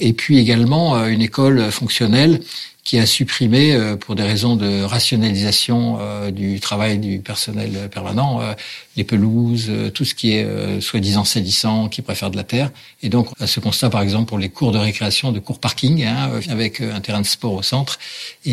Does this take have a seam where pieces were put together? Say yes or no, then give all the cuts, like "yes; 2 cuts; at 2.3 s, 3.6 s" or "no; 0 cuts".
yes; 2 cuts; at 13.3 s, 16.4 s